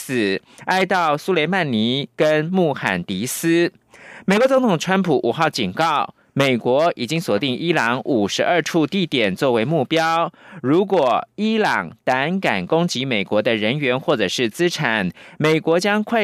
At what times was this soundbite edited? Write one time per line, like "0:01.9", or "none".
none